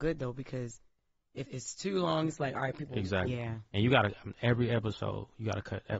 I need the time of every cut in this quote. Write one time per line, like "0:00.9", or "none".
0:01.5
0:03.3